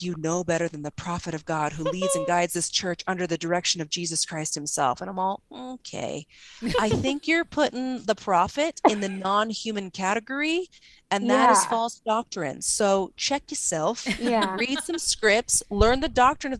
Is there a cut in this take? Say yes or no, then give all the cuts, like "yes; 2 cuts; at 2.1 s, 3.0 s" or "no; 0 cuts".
no; 0 cuts